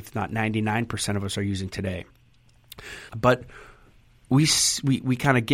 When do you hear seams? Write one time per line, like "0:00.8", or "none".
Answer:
0:03.1